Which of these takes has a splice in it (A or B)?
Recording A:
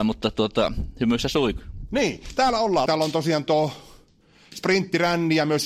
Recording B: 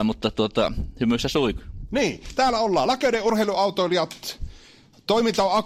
A